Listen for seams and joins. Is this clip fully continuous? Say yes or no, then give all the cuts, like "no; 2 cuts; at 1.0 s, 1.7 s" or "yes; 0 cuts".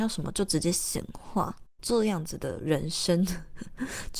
yes; 0 cuts